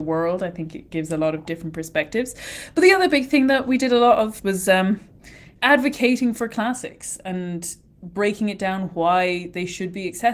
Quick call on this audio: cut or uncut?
cut